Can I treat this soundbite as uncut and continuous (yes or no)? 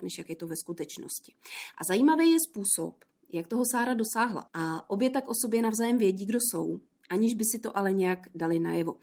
no